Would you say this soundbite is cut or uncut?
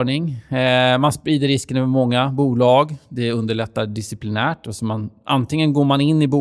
uncut